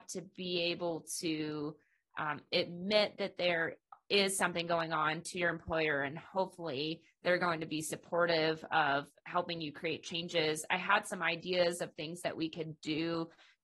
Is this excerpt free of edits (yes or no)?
yes